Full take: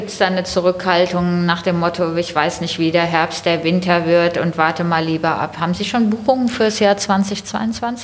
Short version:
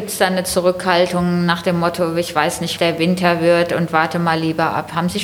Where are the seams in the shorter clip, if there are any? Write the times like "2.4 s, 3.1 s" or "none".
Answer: 2.8 s